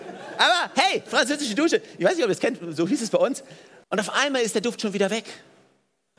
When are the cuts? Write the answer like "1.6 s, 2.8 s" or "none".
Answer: 3.8 s